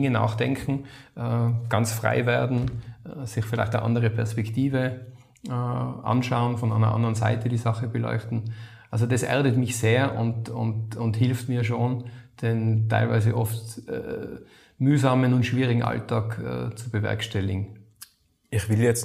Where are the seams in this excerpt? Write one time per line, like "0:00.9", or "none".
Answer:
none